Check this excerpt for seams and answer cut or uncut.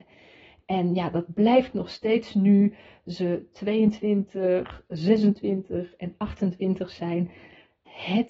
uncut